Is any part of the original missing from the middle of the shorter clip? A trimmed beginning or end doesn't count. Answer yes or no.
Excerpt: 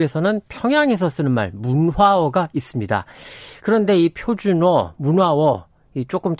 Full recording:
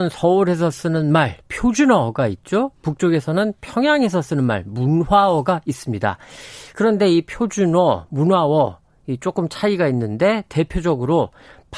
no